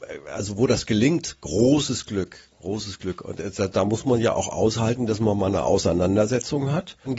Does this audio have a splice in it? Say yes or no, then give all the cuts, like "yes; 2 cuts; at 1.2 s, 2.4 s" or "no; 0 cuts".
no; 0 cuts